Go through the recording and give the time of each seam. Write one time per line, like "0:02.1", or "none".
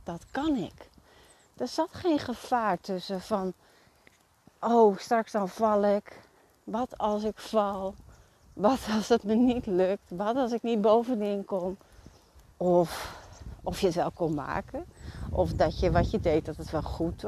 0:12.5

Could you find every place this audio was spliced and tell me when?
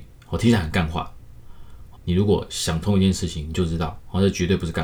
0:02.0

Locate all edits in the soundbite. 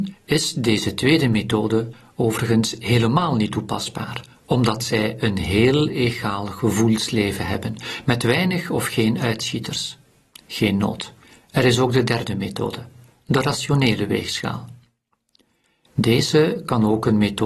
none

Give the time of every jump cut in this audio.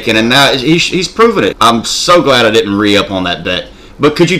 0:01.5

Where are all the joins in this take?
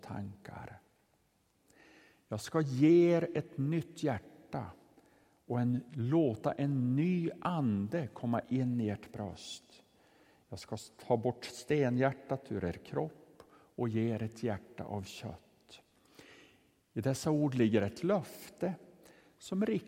none

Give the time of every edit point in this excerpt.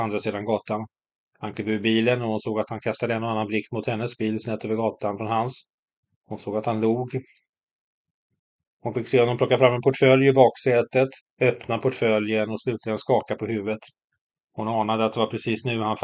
0:11.2

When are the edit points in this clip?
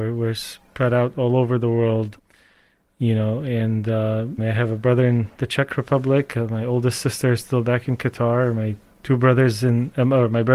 0:04.4

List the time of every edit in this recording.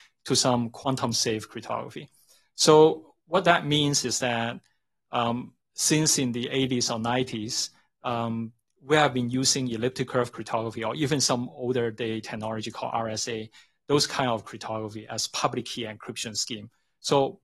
none

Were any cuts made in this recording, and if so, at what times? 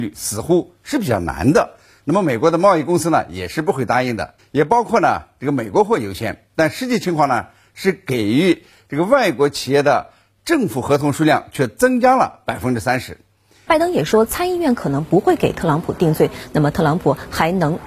0:04.4
0:13.7

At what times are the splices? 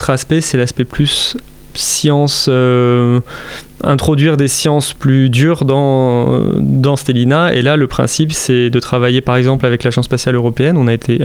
none

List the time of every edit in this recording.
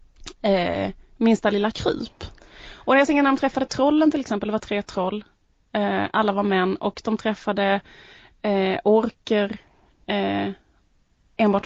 none

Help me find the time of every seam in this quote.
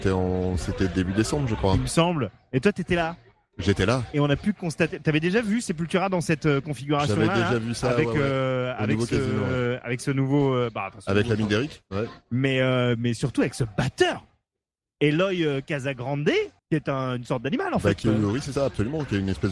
0:16.6

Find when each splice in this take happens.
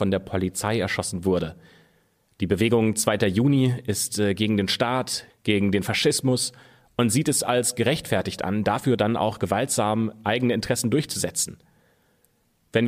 0:05.3

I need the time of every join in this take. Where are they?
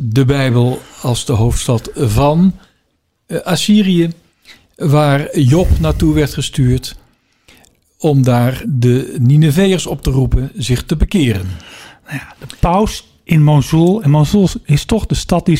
0:08.6

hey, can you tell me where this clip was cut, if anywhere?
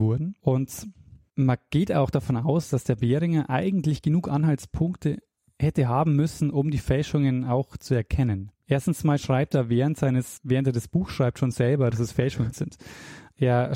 0:08.6
0:10.4
0:11.9

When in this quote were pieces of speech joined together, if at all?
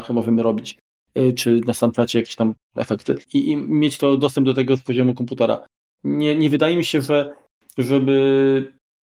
0:03.2
0:06.0

